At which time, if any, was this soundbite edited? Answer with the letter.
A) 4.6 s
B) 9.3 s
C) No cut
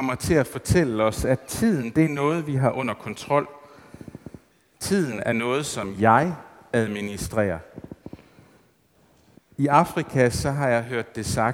B